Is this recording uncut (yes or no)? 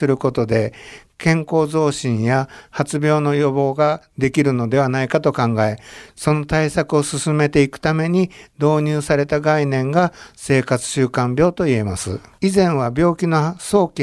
no